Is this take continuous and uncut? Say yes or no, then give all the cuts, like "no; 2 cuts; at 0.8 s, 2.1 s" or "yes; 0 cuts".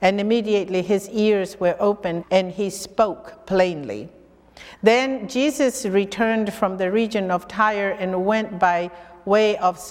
no; 2 cuts; at 2.2 s, 4.8 s